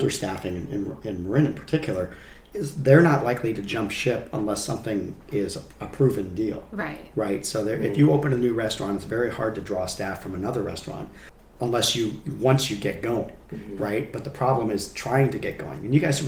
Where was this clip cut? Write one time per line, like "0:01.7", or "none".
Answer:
none